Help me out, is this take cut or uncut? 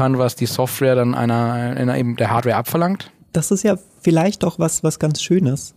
uncut